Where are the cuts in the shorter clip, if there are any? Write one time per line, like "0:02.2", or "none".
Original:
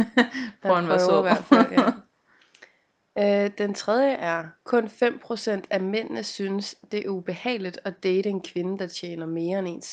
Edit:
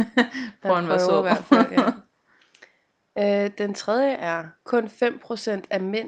none